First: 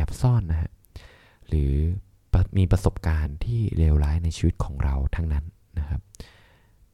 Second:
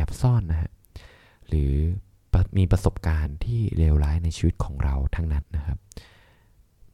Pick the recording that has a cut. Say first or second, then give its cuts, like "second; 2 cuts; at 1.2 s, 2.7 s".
second; 1 cut; at 5.4 s